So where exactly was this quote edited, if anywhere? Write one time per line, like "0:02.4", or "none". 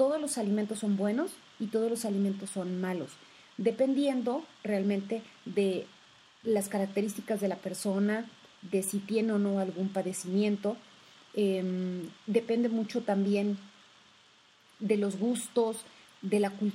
none